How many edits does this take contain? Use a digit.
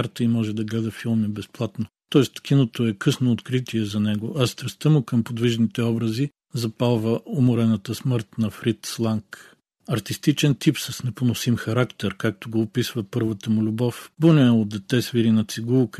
1